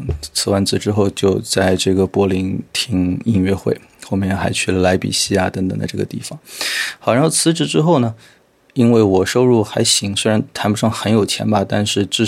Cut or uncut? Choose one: uncut